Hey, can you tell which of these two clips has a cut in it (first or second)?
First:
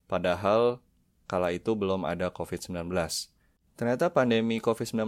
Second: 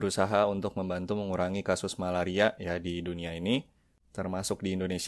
first